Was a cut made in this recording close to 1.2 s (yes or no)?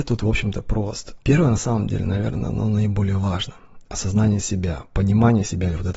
yes